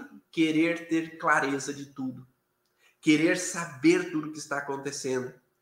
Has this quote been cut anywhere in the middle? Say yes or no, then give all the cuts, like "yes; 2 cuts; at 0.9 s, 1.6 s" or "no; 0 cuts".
no; 0 cuts